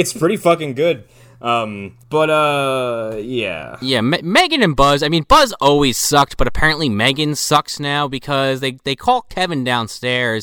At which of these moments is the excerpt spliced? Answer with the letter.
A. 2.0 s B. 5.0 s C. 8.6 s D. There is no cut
A